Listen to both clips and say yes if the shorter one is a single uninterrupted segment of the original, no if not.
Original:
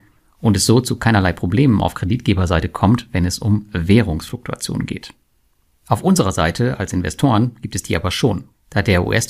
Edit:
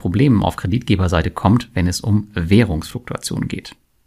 yes